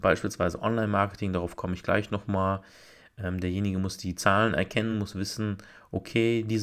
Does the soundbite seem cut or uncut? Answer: uncut